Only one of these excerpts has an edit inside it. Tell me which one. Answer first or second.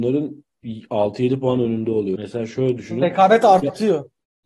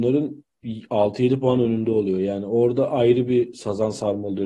first